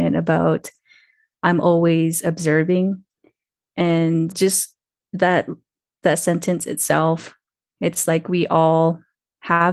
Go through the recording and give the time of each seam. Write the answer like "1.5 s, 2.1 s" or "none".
4.3 s

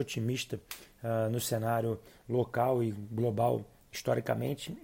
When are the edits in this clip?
none

